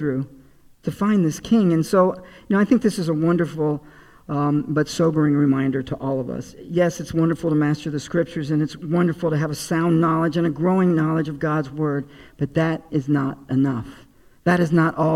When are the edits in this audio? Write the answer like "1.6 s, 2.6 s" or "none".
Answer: none